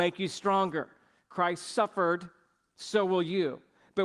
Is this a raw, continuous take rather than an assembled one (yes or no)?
yes